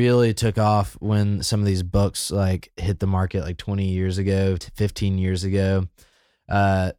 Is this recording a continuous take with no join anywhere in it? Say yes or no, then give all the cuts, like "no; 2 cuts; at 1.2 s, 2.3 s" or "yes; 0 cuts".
yes; 0 cuts